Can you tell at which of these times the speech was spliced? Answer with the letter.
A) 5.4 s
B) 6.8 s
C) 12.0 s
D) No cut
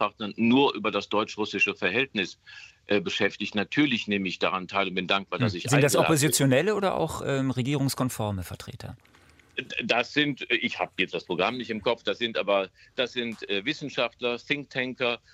D